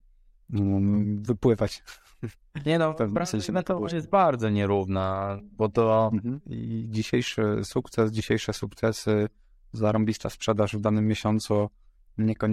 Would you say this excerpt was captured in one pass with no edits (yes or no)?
no